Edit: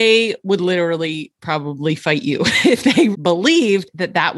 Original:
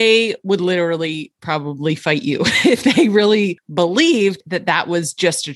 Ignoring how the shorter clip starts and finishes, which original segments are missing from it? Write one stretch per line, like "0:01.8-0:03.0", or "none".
0:03.1-0:03.6